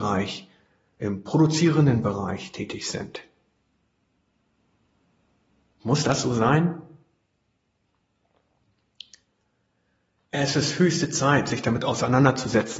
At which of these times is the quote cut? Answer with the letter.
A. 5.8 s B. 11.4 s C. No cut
A